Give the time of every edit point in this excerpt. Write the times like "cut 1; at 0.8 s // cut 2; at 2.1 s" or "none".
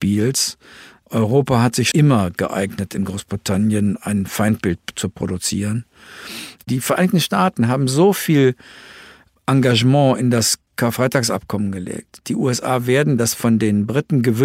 cut 1; at 1.9 s // cut 2; at 6.6 s